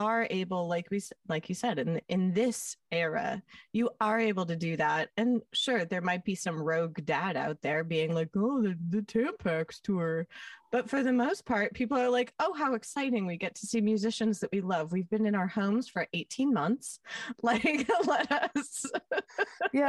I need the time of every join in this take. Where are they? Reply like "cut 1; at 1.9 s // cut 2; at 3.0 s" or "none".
none